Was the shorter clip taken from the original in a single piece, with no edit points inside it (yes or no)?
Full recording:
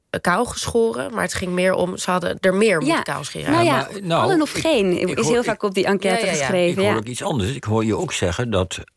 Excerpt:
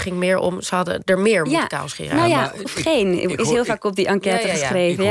no